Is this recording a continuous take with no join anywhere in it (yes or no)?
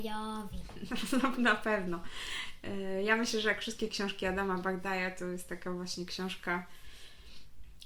yes